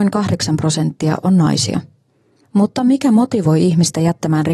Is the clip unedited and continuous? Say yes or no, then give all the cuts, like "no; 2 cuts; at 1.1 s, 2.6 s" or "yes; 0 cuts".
no; 1 cut; at 2.4 s